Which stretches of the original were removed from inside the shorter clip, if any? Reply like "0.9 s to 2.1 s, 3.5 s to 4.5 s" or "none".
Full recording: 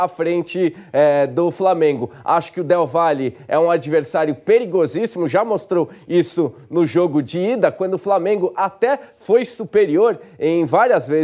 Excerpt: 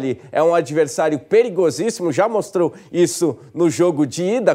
none